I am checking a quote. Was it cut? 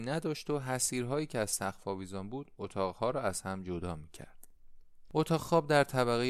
no; 0 cuts

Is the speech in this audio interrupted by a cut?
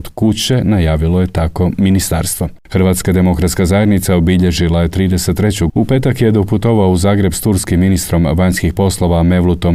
yes; 1 cut; at 5.7 s

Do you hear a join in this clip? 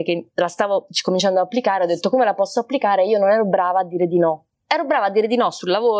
no; 0 cuts

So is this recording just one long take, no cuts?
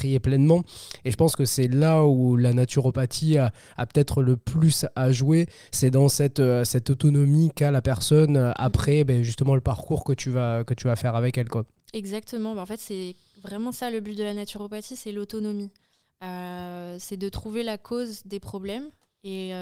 yes; 0 cuts

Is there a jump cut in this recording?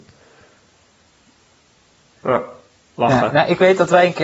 no; 0 cuts

